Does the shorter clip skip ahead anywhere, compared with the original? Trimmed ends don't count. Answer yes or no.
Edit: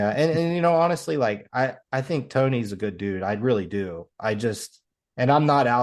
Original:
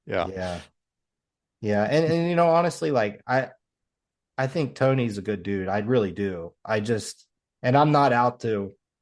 yes